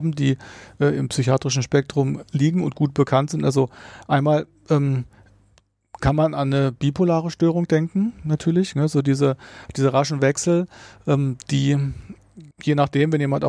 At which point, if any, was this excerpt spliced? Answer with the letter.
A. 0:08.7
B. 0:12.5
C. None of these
B